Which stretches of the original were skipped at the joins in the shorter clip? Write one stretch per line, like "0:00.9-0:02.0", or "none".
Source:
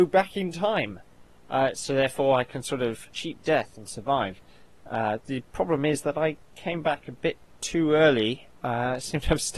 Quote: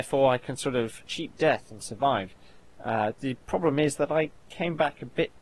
none